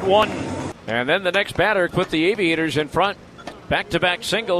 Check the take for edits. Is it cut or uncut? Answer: cut